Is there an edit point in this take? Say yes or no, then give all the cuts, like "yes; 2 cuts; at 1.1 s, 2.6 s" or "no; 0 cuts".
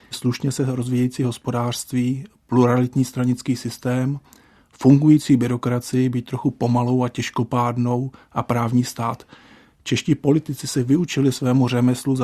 no; 0 cuts